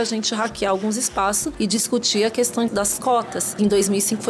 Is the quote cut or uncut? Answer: cut